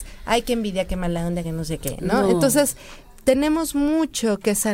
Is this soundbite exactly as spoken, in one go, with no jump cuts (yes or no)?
yes